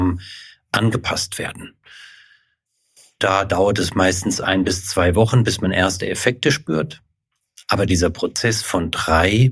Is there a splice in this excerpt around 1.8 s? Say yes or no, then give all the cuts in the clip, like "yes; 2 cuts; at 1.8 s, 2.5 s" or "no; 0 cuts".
no; 0 cuts